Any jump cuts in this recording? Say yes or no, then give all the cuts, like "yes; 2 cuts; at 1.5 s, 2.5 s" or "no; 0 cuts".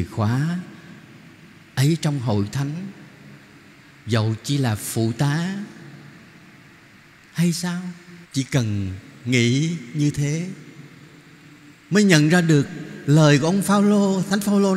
yes; 1 cut; at 8.2 s